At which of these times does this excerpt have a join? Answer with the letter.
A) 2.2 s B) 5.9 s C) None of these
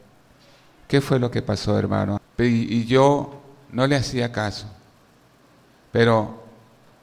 A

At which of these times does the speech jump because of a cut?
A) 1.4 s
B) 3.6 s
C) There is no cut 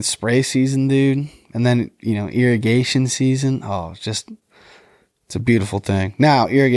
C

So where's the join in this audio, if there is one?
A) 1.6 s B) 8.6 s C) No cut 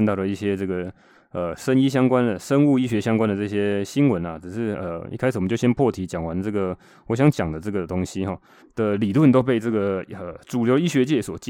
B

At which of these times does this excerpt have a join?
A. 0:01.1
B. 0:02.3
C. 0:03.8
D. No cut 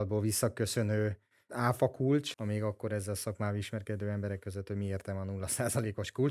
B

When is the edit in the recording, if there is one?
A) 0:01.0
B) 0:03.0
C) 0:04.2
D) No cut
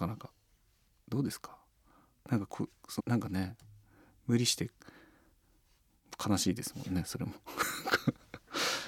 B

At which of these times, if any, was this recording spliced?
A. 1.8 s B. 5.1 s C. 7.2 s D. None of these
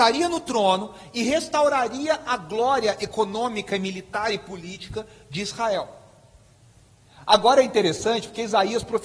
D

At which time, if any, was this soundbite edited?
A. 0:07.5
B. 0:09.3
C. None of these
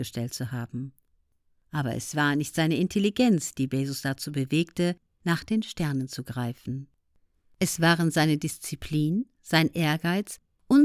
C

